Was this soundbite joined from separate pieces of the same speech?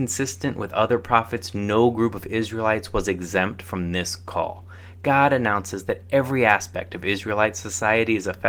no; 0 cuts

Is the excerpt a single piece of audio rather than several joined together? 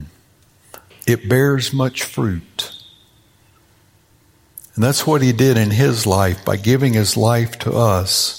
no; 1 cut; at 0.9 s

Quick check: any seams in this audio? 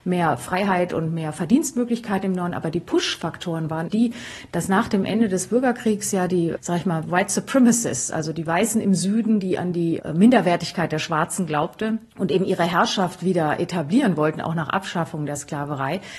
yes; 1 cut; at 3.9 s

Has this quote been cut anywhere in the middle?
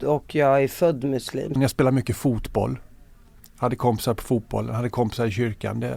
yes; 1 cut; at 1.6 s

